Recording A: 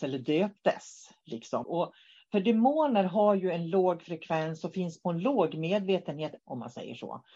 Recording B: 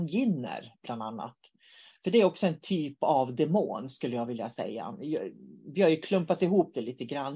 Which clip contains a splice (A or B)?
A